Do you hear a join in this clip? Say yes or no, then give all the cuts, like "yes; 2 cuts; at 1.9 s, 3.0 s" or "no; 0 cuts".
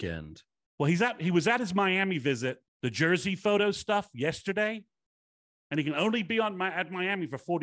yes; 1 cut; at 2.6 s